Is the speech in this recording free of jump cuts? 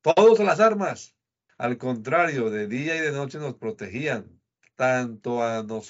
no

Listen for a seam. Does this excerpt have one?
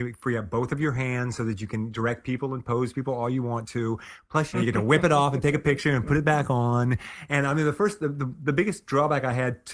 yes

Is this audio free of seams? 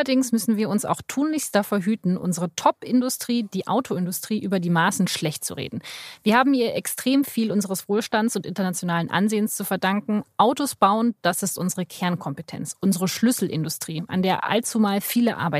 yes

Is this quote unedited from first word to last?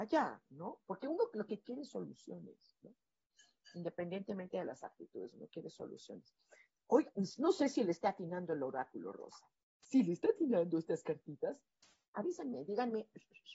yes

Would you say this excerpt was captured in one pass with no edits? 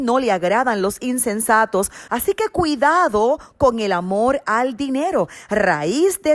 no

